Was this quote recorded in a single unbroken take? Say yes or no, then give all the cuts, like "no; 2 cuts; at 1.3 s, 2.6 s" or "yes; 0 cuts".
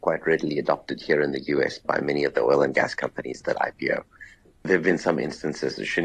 yes; 0 cuts